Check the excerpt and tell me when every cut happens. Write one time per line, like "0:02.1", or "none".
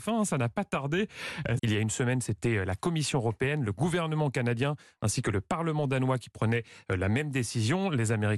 0:01.6